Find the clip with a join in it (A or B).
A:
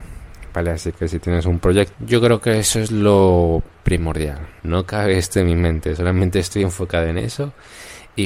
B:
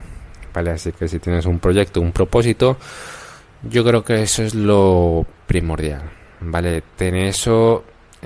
A